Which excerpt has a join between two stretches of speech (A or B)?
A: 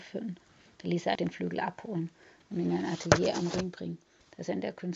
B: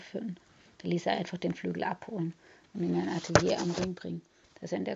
A